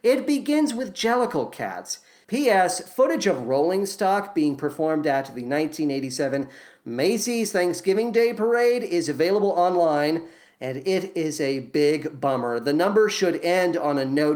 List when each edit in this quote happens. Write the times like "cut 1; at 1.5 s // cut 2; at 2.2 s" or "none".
cut 1; at 2.2 s

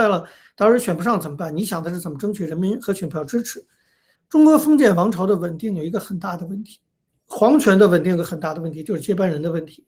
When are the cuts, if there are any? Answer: cut 1; at 4.2 s

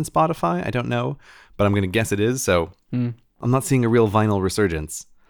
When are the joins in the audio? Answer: none

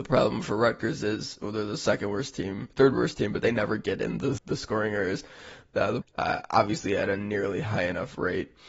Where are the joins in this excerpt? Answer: cut 1; at 4.4 s // cut 2; at 6.0 s

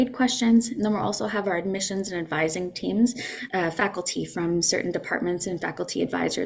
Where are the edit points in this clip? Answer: cut 1; at 3.5 s

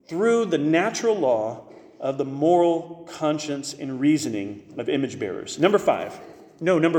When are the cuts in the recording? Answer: none

